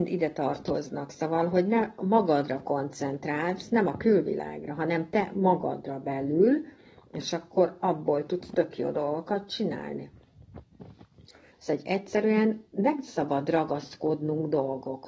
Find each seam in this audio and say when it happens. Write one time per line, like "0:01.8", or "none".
0:11.5